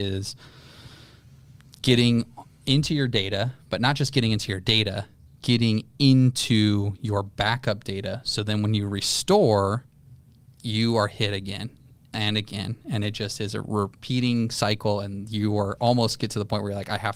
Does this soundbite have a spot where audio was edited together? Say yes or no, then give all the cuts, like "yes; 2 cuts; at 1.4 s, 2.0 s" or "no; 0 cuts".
no; 0 cuts